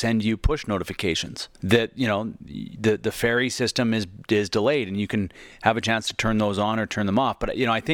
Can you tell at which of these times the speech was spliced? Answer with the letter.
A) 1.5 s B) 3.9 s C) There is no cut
A